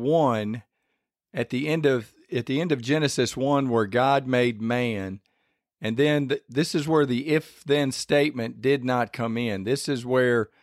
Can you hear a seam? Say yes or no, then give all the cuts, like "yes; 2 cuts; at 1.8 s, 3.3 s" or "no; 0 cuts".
no; 0 cuts